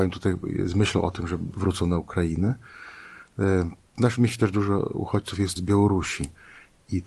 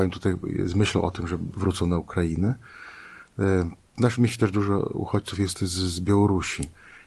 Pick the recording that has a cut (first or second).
first